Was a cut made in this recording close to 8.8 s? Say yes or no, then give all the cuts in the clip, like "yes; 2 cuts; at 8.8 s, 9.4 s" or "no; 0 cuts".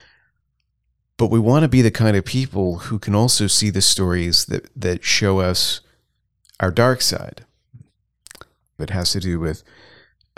yes; 1 cut; at 8.8 s